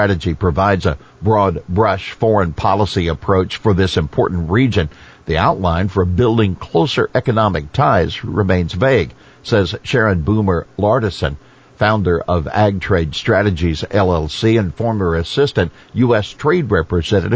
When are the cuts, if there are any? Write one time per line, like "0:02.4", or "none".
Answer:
none